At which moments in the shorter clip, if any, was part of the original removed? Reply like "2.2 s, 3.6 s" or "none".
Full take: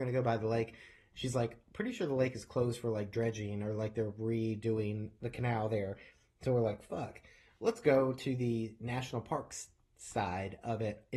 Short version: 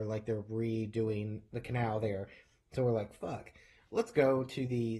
none